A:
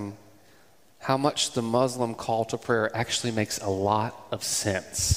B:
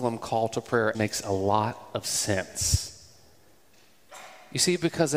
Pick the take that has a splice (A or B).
B